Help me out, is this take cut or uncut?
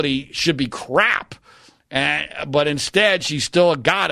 uncut